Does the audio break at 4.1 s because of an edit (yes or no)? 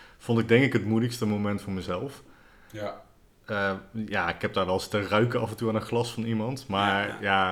no